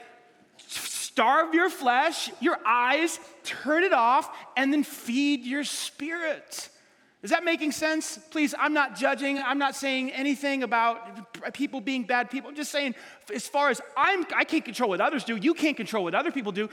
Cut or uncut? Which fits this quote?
uncut